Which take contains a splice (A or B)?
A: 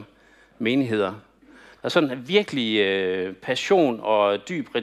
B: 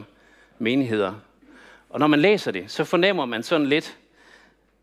A